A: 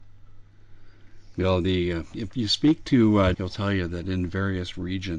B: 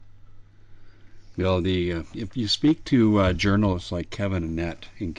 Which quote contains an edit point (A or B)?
A